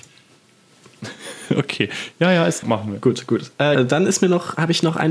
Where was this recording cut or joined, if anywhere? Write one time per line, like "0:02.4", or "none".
0:02.6
0:03.7